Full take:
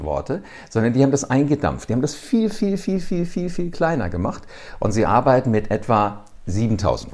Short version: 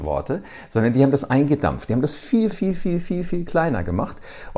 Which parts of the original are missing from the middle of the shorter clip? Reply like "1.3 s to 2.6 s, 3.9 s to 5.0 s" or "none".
2.5 s to 2.8 s